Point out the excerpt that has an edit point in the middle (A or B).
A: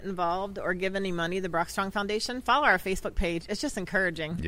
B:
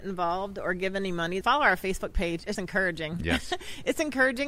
B